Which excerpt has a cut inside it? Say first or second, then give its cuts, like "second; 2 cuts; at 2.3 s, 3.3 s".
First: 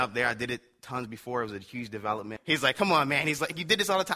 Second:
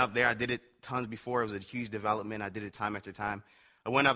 first; 1 cut; at 2.4 s